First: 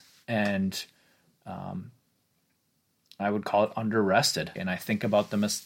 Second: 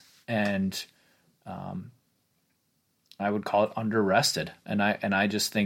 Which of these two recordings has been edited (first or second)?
first